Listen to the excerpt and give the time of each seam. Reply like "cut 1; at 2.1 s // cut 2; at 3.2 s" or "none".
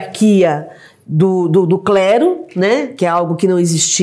none